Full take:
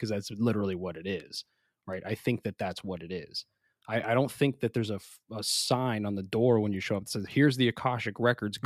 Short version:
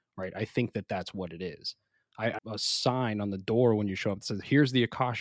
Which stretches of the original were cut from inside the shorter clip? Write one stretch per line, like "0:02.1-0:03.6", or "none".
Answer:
0:04.1-0:05.2